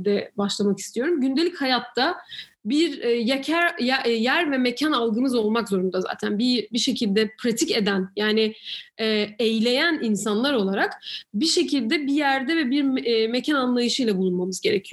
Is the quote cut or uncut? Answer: uncut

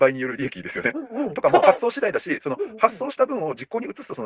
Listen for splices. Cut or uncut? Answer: cut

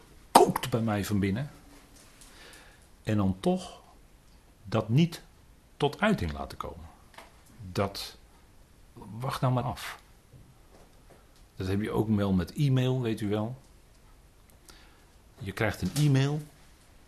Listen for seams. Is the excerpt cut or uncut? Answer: cut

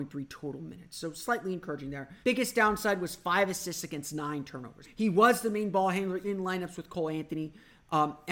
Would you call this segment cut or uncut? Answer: cut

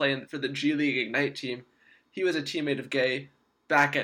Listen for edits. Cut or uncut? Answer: uncut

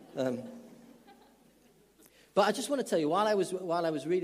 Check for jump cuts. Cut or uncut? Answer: uncut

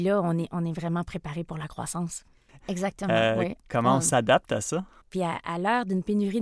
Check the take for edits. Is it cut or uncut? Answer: cut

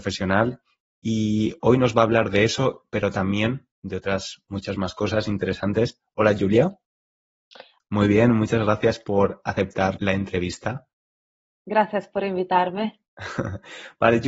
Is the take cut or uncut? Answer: cut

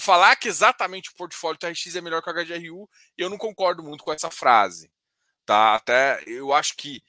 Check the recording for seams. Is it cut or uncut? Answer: uncut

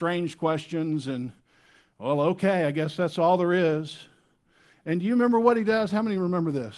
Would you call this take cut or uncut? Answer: uncut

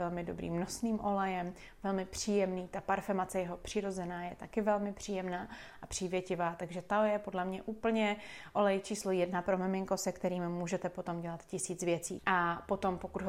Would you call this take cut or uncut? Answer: cut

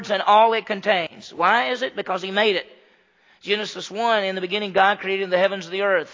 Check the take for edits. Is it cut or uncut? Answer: uncut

